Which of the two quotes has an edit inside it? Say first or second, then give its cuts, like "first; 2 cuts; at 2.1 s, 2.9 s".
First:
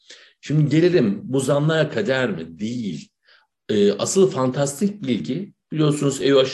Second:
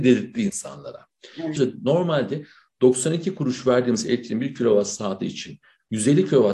second; 1 cut; at 1.6 s